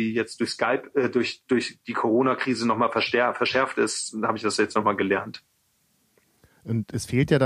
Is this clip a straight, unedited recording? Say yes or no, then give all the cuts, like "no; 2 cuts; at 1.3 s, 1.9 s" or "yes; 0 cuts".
yes; 0 cuts